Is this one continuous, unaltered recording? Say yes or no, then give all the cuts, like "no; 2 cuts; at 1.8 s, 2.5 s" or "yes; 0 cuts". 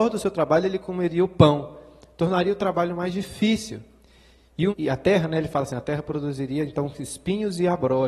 no; 1 cut; at 4.7 s